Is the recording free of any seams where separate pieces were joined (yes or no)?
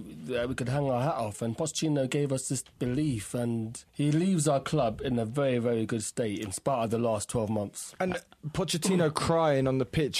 no